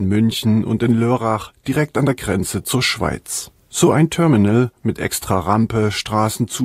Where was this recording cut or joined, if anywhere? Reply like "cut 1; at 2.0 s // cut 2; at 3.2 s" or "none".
none